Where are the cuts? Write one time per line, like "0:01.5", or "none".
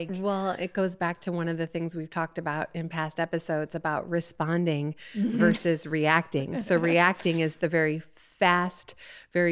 none